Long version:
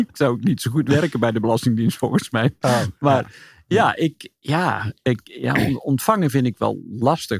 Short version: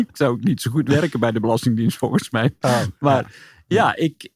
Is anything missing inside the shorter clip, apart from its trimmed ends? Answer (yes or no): no